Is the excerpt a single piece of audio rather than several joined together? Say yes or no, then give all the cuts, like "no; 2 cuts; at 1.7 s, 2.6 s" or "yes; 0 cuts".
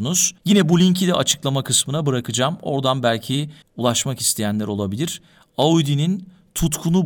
yes; 0 cuts